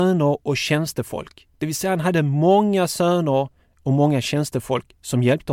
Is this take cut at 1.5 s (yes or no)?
no